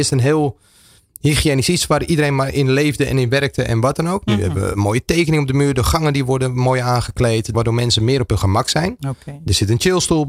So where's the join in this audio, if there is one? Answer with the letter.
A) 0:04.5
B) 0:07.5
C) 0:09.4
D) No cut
B